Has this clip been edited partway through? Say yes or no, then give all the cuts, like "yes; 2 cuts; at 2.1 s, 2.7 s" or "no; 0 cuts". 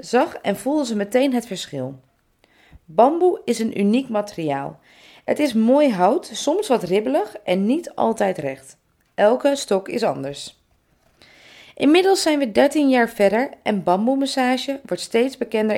no; 0 cuts